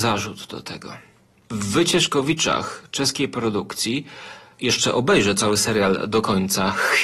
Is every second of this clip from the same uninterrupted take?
yes; 0 cuts

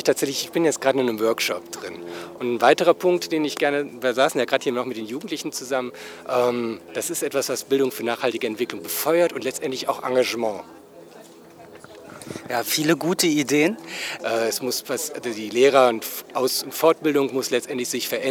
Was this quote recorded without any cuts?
no; 3 cuts; at 2.4 s, 6.9 s, 14.2 s

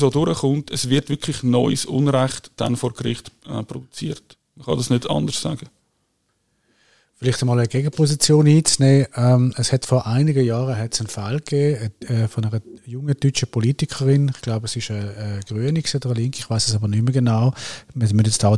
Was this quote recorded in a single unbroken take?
yes; 0 cuts

